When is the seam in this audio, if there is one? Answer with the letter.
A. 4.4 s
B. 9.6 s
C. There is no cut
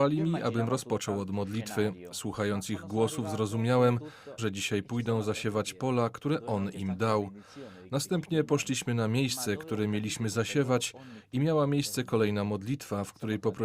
A